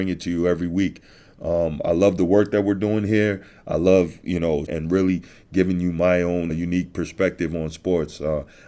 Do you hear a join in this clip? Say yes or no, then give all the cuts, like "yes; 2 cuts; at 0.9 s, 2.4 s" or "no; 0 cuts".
yes; 2 cuts; at 4.7 s, 6.5 s